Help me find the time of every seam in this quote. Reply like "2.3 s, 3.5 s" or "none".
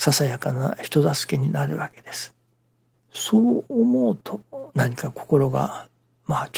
2.9 s